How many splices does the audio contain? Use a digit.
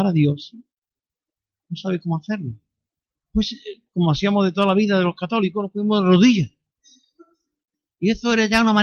0